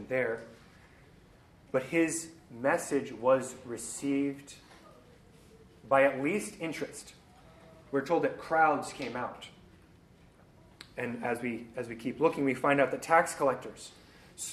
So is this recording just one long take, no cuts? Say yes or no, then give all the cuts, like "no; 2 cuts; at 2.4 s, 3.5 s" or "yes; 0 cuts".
yes; 0 cuts